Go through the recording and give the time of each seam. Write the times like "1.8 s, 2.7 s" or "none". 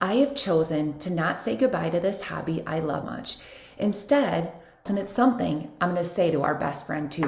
3.0 s, 4.9 s